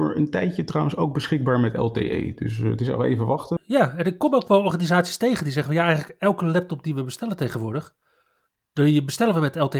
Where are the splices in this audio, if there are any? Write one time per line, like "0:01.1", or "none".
0:03.6